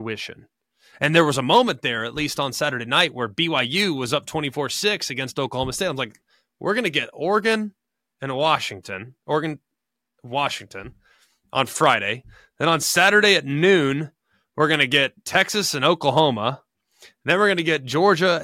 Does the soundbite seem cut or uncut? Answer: uncut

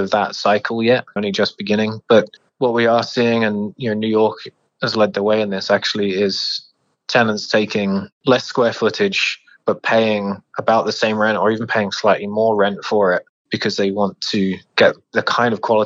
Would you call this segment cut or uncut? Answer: cut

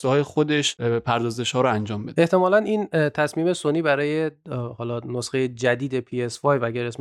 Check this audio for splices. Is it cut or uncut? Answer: uncut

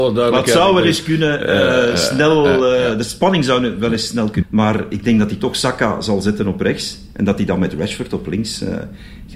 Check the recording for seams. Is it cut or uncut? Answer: cut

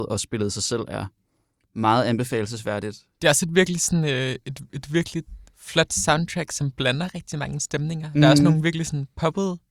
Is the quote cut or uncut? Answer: uncut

